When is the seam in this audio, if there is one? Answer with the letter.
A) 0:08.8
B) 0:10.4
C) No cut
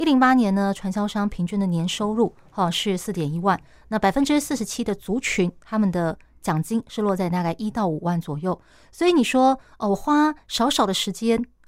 C